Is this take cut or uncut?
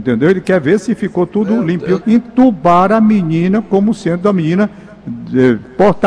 cut